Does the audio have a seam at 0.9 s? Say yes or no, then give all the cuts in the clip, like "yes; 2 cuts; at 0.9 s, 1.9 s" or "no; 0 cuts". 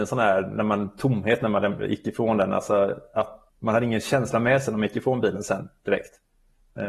no; 0 cuts